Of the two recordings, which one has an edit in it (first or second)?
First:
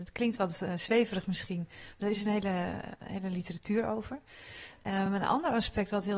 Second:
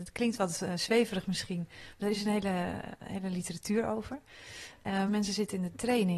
second